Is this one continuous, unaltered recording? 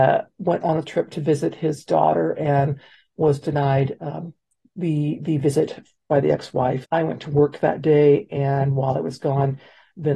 no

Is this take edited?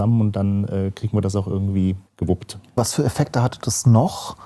yes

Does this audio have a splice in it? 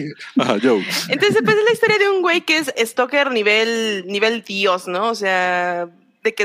yes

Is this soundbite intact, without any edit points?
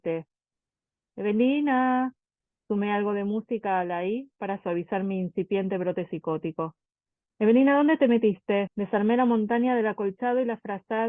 no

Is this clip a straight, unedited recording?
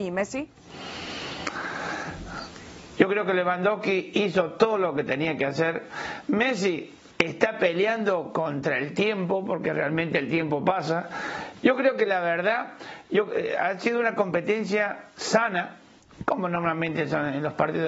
no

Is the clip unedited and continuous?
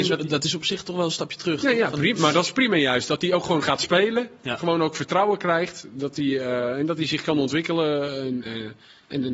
no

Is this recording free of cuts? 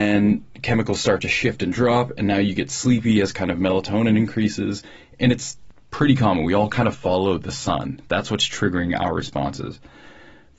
yes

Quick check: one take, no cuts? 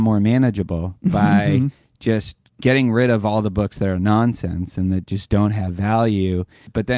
yes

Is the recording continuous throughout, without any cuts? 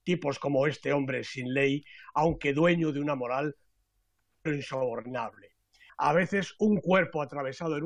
no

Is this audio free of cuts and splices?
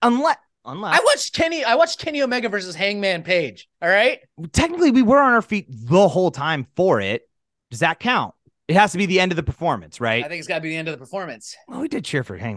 yes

